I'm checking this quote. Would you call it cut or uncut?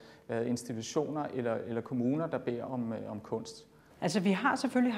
cut